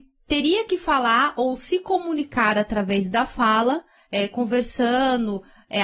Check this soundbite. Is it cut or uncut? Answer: cut